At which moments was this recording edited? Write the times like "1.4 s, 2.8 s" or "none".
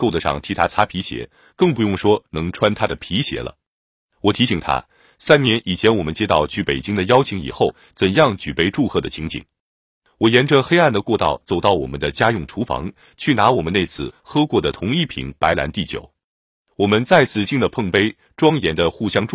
17.5 s